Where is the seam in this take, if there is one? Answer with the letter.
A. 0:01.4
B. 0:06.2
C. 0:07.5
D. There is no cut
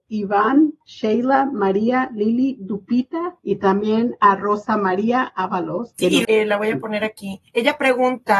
B